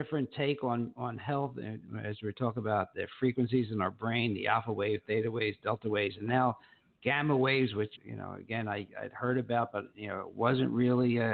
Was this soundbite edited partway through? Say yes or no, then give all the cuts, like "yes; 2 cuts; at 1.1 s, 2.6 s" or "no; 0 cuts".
yes; 1 cut; at 7.9 s